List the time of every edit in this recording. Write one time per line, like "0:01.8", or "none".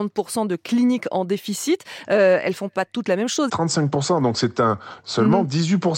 0:03.5
0:05.0